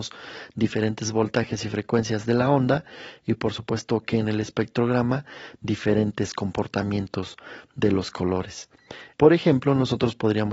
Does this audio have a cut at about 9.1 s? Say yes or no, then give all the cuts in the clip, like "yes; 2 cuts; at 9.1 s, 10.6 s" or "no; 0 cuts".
yes; 1 cut; at 9.1 s